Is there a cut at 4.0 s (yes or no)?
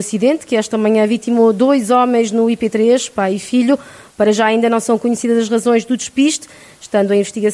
no